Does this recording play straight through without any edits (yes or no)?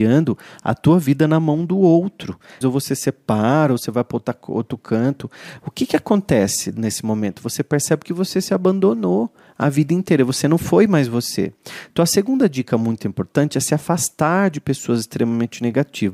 no